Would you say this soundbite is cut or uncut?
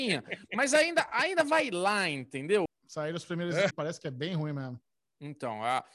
cut